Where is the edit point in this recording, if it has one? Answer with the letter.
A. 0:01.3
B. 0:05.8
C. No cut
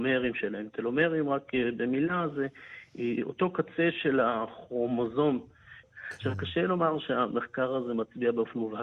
B